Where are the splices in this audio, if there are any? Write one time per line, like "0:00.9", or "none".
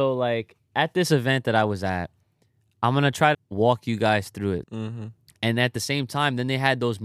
0:03.3
0:04.6